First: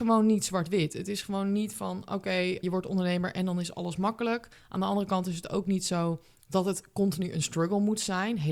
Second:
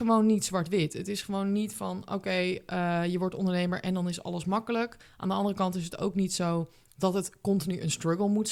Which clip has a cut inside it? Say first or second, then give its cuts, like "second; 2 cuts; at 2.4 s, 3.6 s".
first; 1 cut; at 2.6 s